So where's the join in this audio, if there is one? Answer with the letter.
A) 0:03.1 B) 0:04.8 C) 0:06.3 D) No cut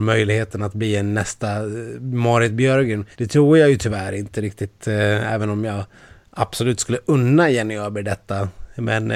A